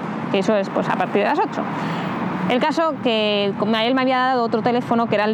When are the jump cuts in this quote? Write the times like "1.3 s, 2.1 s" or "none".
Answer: none